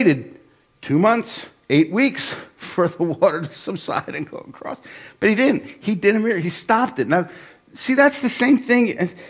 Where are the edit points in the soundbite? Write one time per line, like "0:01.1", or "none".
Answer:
none